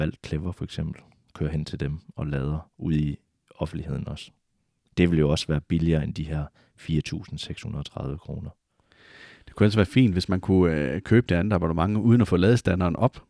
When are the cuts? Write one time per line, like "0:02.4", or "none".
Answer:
none